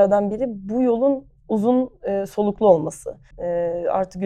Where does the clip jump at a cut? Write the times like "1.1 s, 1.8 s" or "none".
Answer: 3.3 s